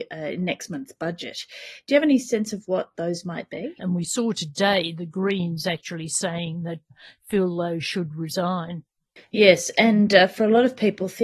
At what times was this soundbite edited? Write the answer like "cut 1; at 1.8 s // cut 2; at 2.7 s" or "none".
cut 1; at 3.8 s